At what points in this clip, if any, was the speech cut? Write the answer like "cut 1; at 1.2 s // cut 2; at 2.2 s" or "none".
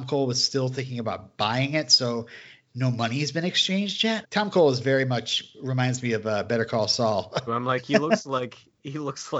cut 1; at 4.2 s // cut 2; at 7.5 s